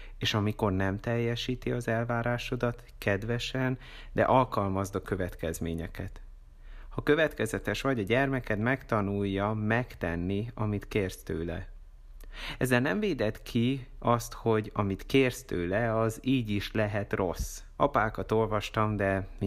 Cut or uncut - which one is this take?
cut